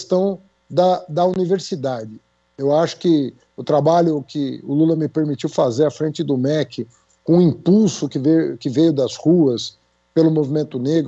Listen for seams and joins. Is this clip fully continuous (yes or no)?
yes